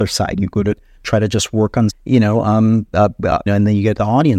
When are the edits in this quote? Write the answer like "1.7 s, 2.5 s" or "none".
1.9 s, 3.5 s

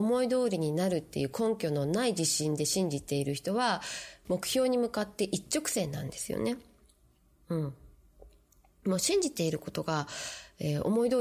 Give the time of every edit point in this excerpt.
4.3 s

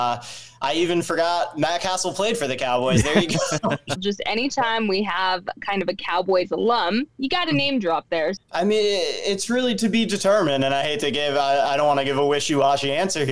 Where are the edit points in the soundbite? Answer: 4.0 s, 8.4 s

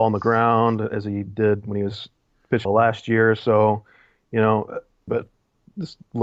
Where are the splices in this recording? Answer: 2.7 s, 5.1 s

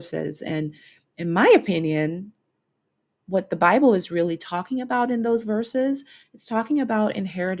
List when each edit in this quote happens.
none

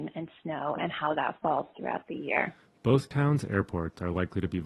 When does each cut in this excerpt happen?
none

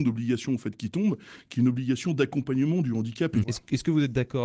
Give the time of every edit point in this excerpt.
3.4 s

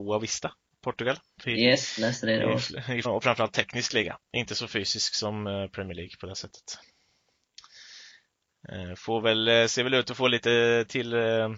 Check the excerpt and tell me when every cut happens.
1.4 s, 3.0 s

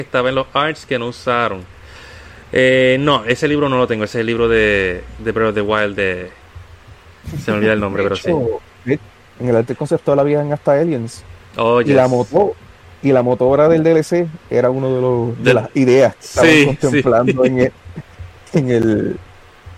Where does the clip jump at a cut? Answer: none

